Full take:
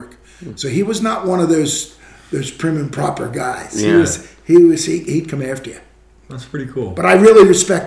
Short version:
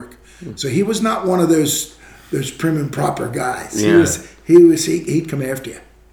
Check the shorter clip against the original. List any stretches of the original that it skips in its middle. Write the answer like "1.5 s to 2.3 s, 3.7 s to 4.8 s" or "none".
none